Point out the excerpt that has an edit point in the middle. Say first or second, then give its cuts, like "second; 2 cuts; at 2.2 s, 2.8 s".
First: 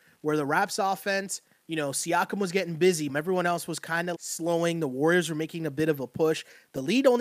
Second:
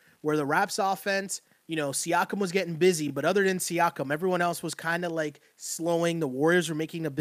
first; 2 cuts; at 3.1 s, 4.1 s